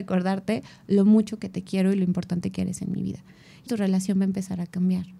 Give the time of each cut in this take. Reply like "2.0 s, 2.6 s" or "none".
3.7 s